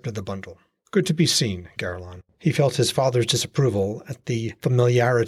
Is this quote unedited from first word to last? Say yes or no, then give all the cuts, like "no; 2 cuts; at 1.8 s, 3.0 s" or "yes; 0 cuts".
yes; 0 cuts